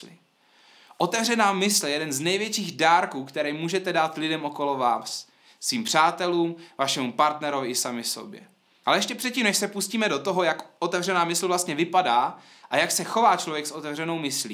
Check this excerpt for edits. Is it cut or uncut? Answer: uncut